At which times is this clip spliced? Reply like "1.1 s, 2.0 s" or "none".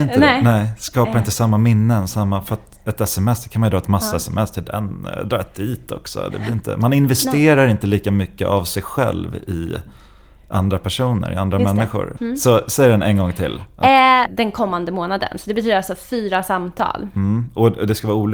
12.2 s, 14.3 s